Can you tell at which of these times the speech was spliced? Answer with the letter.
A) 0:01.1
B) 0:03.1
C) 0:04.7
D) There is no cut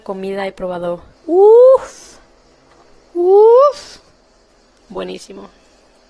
A